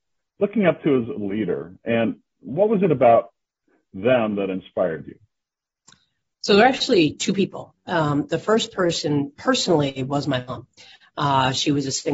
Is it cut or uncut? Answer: uncut